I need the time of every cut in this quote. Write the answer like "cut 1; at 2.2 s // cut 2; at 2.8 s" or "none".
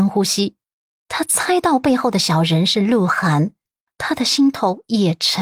cut 1; at 3.9 s